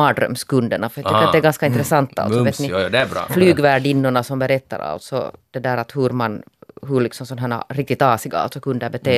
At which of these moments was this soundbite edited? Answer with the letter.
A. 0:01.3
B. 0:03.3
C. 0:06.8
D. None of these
B